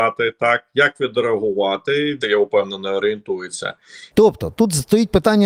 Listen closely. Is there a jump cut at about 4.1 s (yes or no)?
yes